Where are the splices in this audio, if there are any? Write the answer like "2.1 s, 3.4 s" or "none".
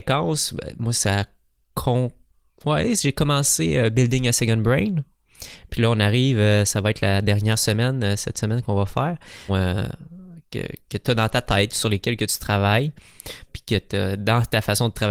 9.5 s, 13.5 s